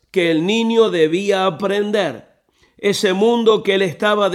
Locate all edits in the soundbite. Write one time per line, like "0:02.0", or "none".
none